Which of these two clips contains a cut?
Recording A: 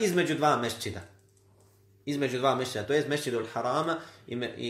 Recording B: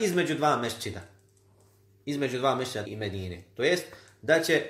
B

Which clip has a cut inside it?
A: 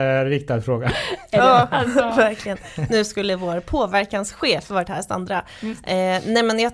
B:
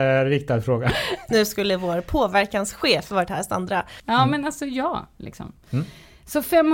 B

